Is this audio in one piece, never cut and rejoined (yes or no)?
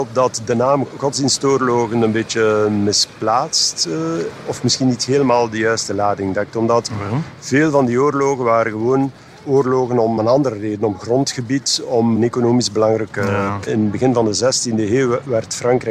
no